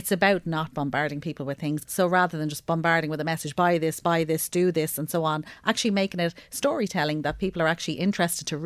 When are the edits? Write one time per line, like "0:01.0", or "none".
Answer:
0:01.9